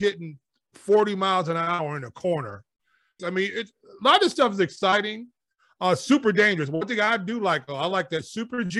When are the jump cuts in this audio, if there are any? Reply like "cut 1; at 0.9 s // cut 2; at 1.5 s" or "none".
cut 1; at 3.2 s